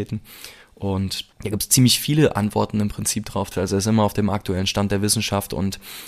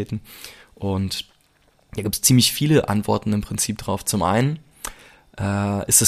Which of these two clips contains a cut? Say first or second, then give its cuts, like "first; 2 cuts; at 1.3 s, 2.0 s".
first; 2 cuts; at 1.3 s, 3.5 s